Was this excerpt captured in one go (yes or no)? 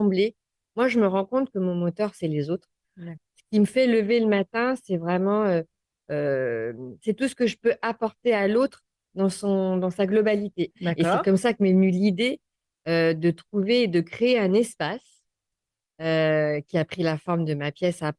no